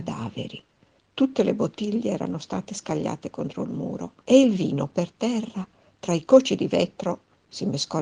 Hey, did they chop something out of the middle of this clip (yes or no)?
yes